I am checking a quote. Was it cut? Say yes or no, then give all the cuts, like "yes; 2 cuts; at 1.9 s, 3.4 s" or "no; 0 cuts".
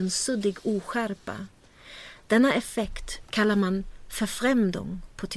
yes; 1 cut; at 3.2 s